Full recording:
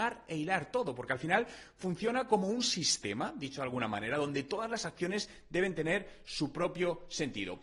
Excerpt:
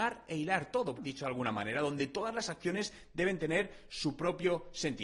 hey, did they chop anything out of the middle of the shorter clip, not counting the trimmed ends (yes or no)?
yes